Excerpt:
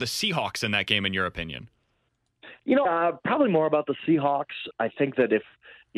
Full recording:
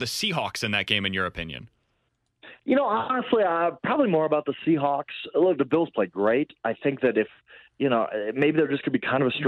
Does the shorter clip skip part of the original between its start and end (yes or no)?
yes